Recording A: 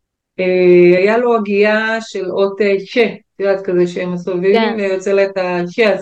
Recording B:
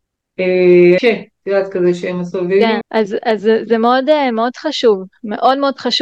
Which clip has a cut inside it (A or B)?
B